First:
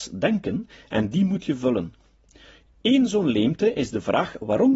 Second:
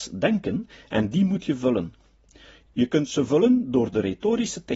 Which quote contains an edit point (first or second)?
second